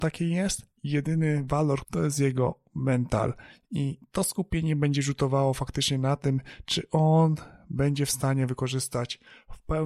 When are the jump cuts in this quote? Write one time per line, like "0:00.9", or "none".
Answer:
0:01.8

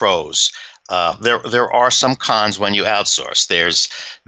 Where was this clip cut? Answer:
0:01.1

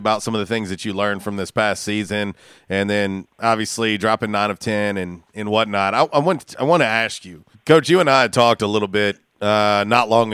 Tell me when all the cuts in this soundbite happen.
0:07.5

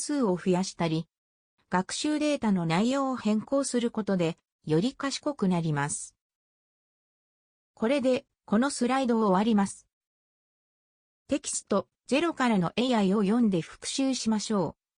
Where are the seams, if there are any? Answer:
none

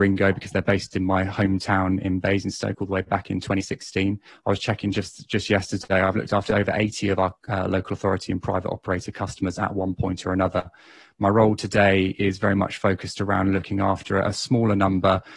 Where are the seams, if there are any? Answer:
0:04.3

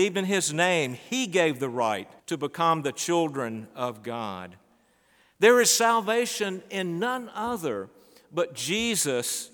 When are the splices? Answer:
0:02.2

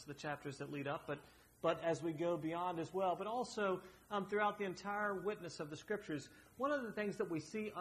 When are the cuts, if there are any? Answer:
none

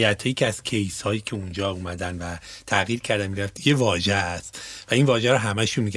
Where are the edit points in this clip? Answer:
0:03.6

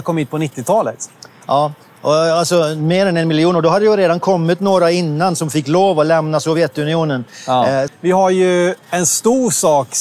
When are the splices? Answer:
0:07.9

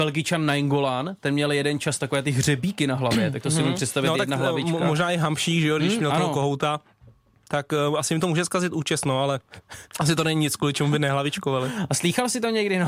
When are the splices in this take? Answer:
0:05.8

